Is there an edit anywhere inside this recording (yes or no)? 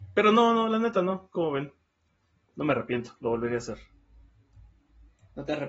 no